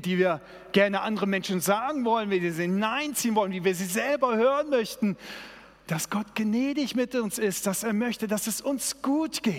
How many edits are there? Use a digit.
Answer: 1